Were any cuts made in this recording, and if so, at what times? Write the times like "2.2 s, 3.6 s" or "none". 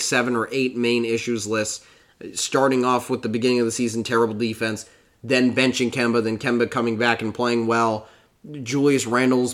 none